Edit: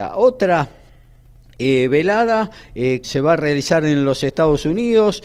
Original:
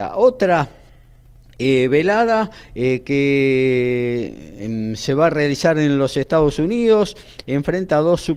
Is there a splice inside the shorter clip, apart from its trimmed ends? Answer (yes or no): yes